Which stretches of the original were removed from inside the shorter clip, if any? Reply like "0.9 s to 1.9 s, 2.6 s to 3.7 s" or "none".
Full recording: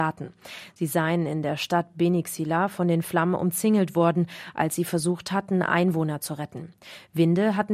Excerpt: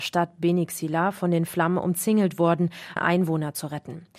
4.5 s to 5.6 s